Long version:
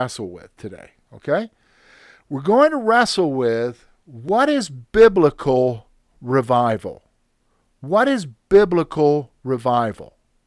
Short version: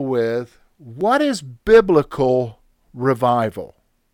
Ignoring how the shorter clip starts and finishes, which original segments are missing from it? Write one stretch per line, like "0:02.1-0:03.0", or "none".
none